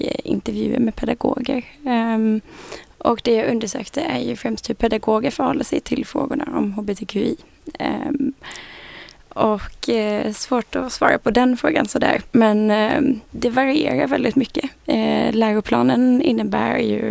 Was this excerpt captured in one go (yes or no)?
yes